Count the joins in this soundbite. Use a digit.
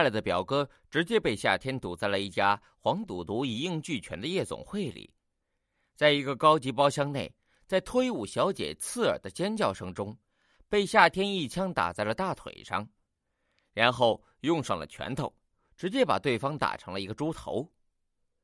0